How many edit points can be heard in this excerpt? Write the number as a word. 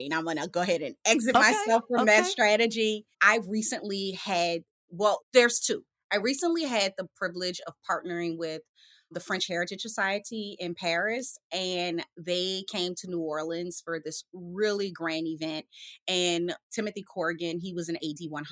one